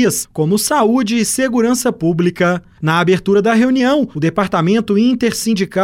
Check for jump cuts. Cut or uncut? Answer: cut